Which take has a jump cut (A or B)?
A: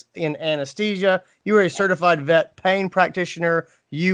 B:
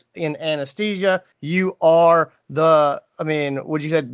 B